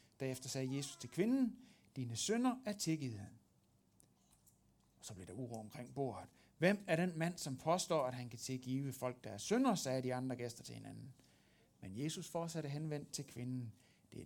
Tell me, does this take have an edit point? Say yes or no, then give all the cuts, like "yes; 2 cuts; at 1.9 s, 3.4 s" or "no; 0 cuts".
no; 0 cuts